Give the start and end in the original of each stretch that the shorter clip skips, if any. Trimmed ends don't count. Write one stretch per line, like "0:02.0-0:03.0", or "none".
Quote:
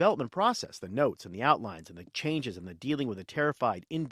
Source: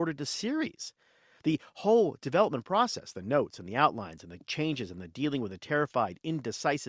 none